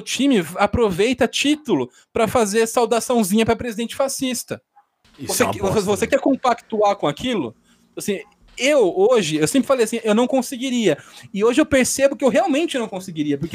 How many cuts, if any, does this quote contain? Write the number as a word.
zero